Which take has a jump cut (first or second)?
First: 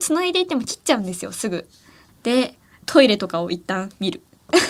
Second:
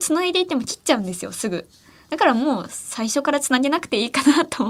first